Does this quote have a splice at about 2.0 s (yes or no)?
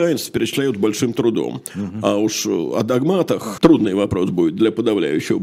no